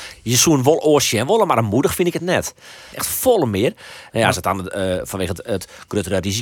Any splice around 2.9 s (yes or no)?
yes